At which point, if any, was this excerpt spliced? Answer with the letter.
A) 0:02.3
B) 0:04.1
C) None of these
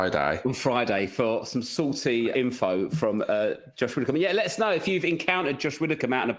A